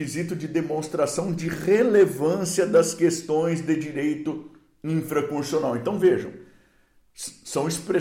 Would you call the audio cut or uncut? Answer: uncut